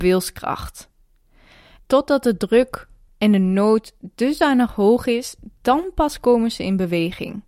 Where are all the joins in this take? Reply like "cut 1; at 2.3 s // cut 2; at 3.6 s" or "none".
none